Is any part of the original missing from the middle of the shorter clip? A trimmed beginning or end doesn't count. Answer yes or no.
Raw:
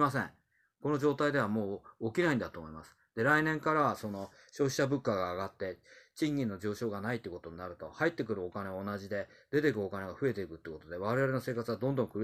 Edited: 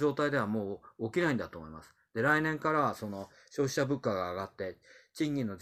no